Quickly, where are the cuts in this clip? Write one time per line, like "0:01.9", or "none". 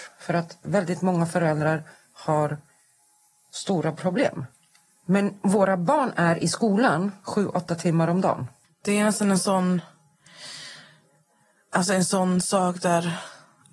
0:08.6

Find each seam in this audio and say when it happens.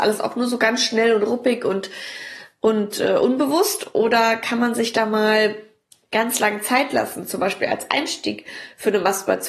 none

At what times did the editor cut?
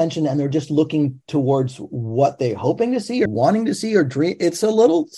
0:03.3

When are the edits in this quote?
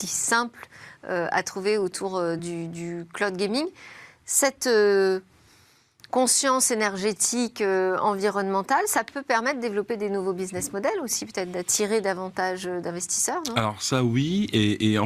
none

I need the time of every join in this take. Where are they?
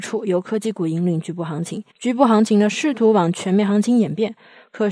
0:01.9

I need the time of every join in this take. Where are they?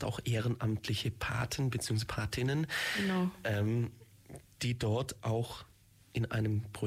none

